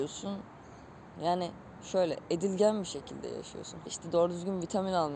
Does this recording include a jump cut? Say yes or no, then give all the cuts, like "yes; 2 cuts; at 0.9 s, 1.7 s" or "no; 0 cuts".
yes; 2 cuts; at 1.2 s, 3.9 s